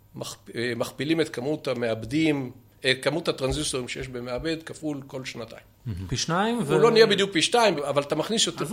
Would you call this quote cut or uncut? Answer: cut